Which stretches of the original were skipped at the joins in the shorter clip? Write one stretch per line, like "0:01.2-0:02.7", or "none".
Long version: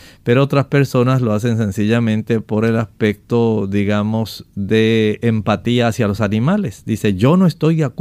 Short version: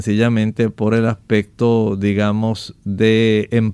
none